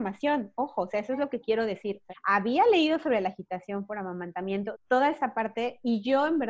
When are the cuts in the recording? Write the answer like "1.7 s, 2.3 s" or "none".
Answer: 2.1 s, 4.7 s